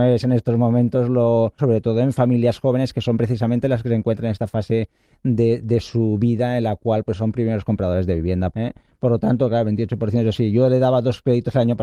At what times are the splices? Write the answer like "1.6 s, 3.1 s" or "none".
1.6 s, 8.5 s